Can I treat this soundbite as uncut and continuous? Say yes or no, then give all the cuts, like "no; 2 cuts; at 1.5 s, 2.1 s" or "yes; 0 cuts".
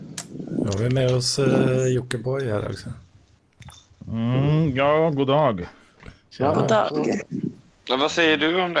yes; 0 cuts